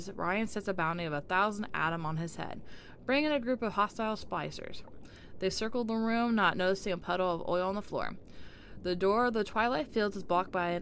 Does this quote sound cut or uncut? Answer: uncut